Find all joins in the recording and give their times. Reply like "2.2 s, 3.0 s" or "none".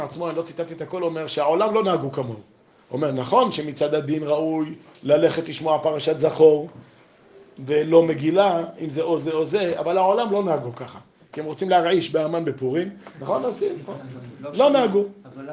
none